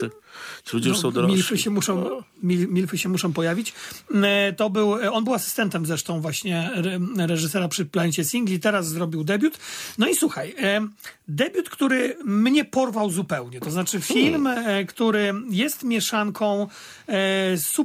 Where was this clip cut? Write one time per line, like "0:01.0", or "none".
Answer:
none